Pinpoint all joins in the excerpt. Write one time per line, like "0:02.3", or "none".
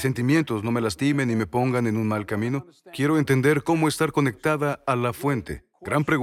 none